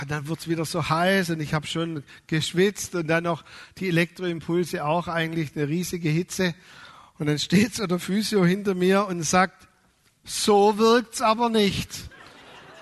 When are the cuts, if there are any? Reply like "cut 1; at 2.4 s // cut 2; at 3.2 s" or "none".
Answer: none